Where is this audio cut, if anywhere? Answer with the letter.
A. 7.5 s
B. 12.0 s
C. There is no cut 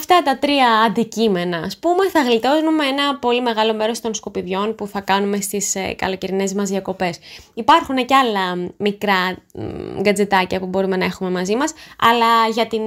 C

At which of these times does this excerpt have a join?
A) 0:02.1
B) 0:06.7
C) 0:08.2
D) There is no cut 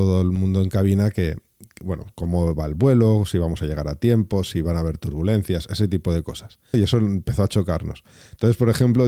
B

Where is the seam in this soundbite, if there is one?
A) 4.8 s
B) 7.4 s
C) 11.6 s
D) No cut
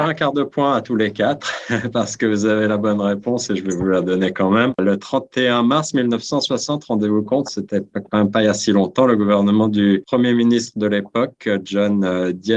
D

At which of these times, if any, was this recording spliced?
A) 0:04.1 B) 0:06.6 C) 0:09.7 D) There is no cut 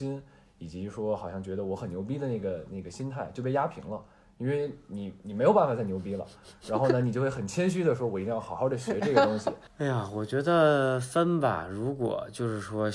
C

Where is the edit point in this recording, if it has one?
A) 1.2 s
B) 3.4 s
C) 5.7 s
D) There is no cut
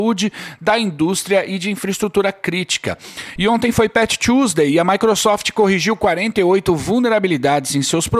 B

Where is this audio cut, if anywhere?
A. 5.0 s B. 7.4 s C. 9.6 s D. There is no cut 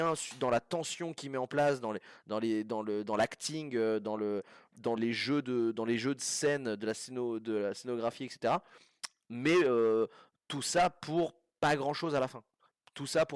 A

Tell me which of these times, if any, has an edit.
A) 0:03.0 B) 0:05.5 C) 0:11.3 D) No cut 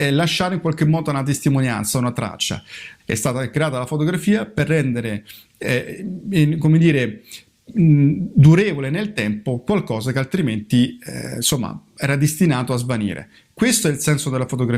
A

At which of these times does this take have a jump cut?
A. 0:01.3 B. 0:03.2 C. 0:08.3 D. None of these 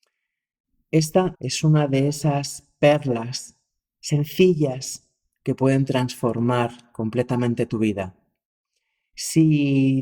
A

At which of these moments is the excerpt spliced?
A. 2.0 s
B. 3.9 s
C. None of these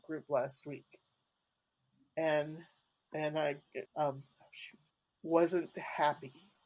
B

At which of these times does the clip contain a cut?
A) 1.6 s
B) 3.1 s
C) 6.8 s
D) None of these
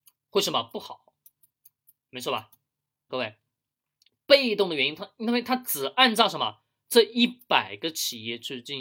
B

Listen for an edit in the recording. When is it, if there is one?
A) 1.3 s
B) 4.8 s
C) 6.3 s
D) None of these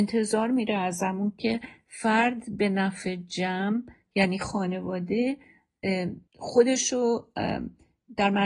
C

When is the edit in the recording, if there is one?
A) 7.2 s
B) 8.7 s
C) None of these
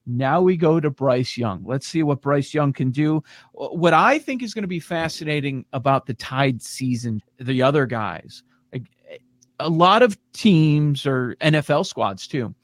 A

